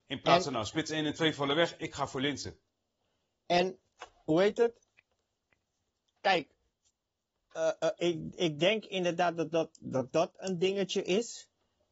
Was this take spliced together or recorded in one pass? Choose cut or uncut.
uncut